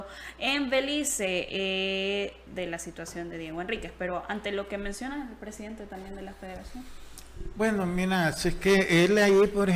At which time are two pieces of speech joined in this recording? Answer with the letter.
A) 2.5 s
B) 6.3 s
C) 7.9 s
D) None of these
A